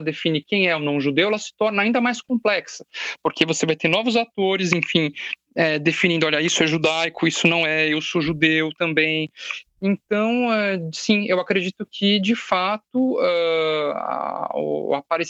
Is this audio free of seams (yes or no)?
no